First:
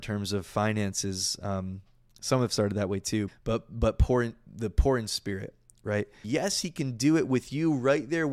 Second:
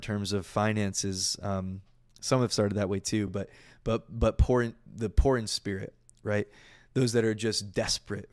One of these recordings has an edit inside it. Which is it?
first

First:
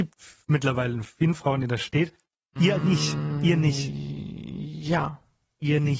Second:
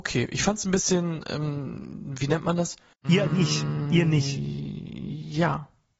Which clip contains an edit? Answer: second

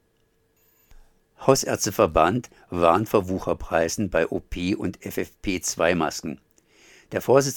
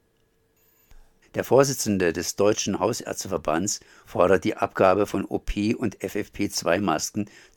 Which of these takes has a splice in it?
second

